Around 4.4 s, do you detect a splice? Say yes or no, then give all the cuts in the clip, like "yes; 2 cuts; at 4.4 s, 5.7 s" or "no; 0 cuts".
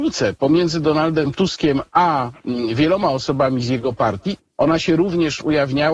yes; 1 cut; at 4.4 s